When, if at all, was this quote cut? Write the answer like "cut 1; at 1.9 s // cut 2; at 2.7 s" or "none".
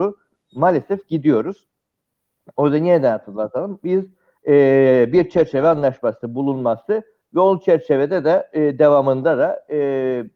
none